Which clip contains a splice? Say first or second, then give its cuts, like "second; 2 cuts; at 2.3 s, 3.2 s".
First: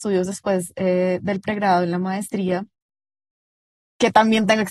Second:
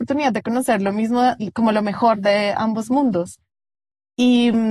second; 1 cut; at 1.4 s